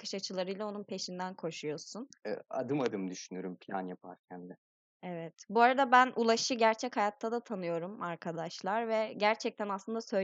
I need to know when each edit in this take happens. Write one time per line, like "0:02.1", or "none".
none